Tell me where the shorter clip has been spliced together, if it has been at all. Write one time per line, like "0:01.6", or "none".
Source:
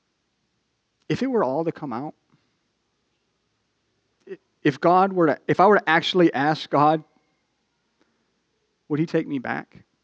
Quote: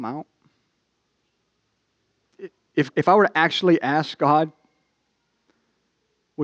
0:02.9